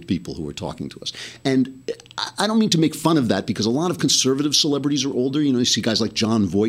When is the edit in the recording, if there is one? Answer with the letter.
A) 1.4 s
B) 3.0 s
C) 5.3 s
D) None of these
D